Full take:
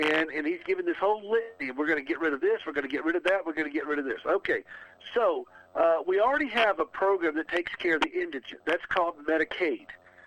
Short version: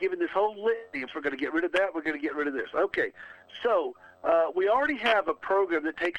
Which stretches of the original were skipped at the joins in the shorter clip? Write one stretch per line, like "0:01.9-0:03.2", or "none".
0:01.7-0:02.6